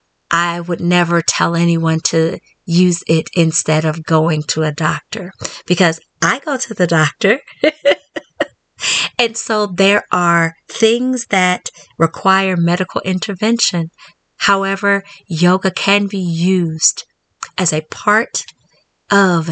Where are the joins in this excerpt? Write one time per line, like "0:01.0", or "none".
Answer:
none